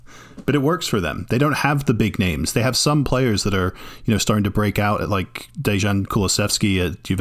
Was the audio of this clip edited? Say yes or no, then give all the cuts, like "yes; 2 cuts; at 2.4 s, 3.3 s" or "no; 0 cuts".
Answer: no; 0 cuts